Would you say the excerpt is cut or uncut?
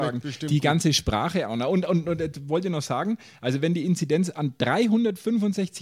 uncut